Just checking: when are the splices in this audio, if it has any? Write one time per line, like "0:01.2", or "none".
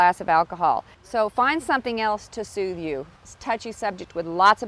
0:00.9
0:03.2